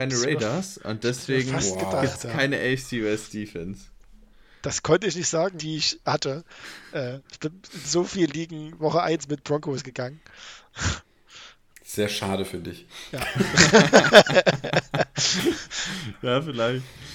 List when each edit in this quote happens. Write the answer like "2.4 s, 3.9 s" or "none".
5.6 s